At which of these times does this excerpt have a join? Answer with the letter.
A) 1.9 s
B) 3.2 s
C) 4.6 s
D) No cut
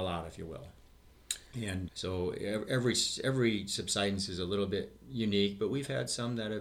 A